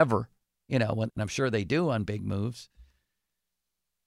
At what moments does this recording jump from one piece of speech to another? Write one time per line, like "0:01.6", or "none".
0:01.1

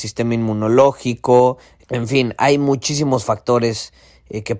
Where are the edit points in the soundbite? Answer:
0:01.8

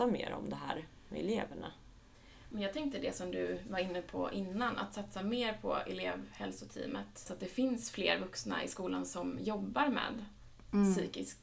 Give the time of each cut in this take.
0:07.3

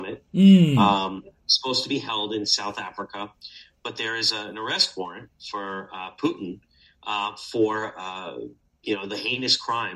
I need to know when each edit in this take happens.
none

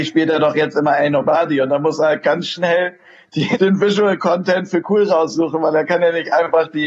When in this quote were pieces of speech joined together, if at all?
0:03.6

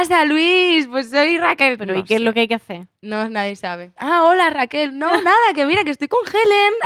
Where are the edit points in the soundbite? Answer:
0:01.8
0:04.0

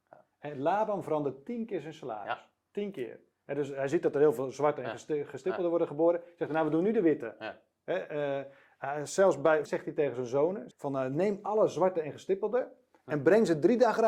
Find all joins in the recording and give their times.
0:09.7
0:10.7

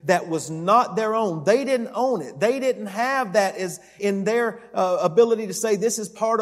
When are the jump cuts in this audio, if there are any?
0:04.0

